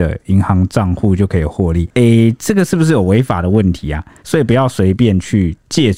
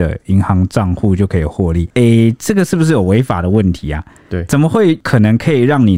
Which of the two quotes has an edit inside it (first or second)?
first